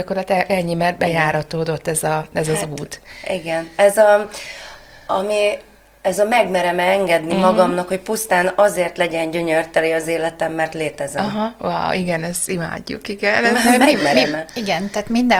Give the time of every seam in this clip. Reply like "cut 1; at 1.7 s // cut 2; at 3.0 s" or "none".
none